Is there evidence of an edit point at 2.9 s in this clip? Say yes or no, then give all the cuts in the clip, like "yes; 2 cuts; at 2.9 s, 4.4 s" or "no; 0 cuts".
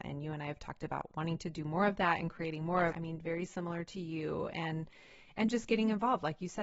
yes; 1 cut; at 2.9 s